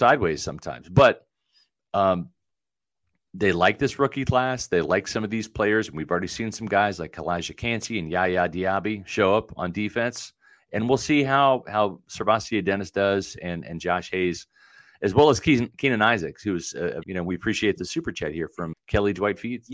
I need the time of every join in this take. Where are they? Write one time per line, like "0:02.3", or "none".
0:17.0
0:18.7

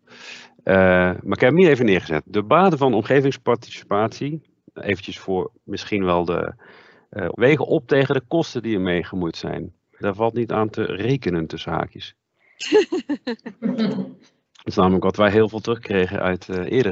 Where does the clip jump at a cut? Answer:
0:07.3
0:10.0

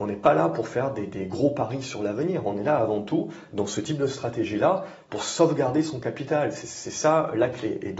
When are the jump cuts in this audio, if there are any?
none

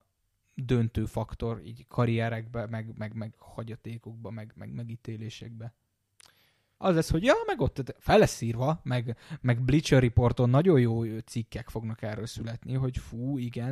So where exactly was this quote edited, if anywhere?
none

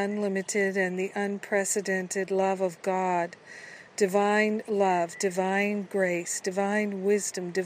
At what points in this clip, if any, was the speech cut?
none

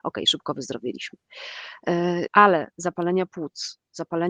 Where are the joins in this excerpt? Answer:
0:02.3

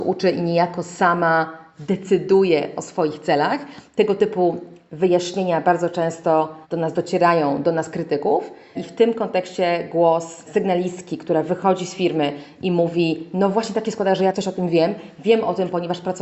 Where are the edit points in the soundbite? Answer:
0:06.6

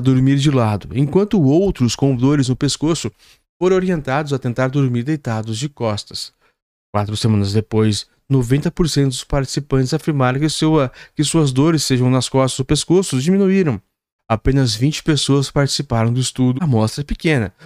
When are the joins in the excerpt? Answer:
0:14.2
0:16.6

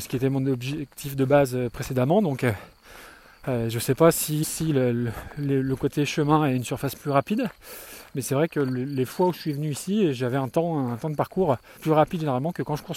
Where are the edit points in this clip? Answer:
0:04.4
0:11.8

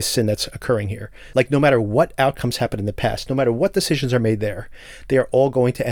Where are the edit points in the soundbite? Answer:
0:01.3

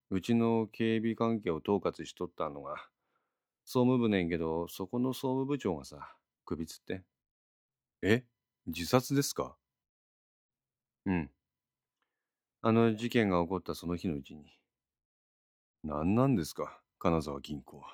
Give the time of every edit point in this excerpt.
0:06.3

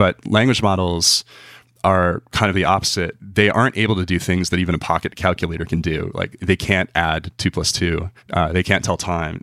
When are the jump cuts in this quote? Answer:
0:08.2

